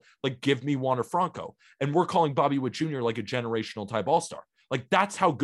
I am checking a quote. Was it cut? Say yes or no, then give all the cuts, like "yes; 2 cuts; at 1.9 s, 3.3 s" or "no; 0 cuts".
no; 0 cuts